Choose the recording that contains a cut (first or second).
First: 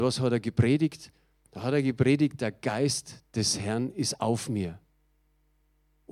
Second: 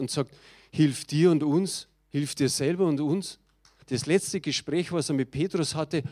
second